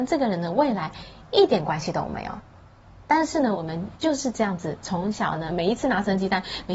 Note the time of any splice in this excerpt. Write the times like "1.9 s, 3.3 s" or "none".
none